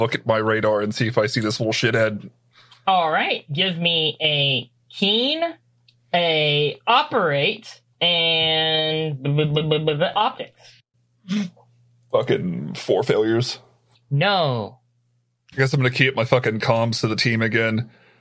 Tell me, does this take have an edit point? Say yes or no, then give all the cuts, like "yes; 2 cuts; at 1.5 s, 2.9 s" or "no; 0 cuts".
yes; 2 cuts; at 7.9 s, 13.9 s